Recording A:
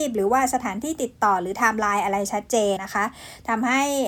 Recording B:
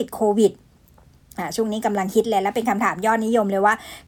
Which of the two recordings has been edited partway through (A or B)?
A